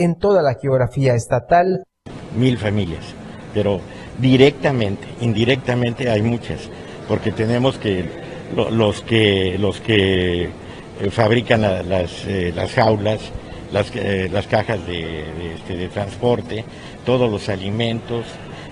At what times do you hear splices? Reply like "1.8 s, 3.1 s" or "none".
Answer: none